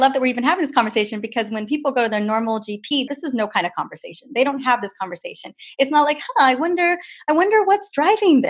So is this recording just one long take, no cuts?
no; 1 cut; at 3.1 s

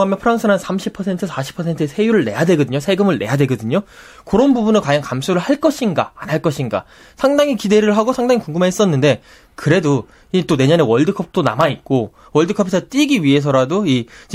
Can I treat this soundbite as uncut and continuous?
yes; 0 cuts

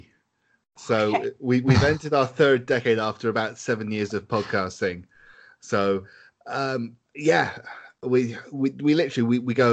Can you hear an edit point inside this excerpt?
no; 0 cuts

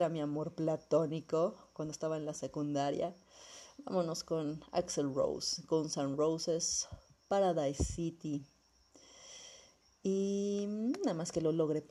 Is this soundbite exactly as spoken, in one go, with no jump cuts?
yes; 0 cuts

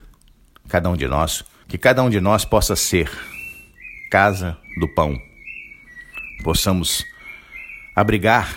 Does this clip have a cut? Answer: yes; 2 cuts; at 1.6 s, 6.4 s

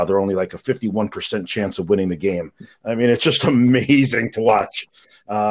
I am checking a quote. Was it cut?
no; 0 cuts

